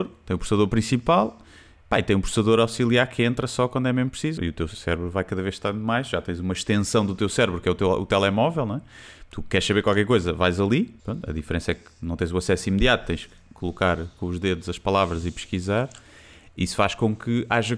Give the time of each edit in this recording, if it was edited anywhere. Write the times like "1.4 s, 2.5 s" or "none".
4.4 s, 11.0 s